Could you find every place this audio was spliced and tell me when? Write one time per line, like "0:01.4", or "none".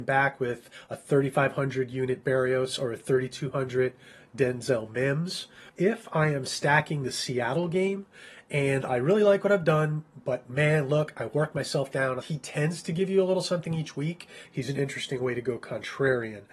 0:05.7
0:12.2
0:14.5